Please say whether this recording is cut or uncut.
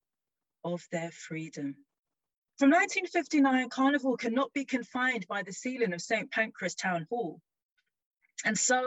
cut